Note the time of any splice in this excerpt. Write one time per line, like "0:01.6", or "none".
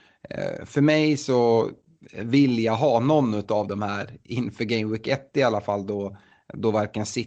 none